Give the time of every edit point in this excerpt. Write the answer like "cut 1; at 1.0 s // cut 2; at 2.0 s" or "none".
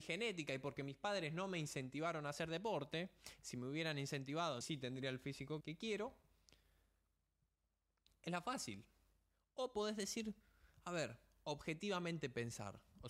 cut 1; at 4.6 s // cut 2; at 5.6 s